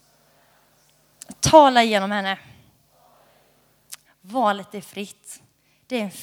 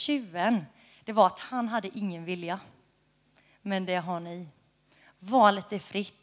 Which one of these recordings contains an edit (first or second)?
first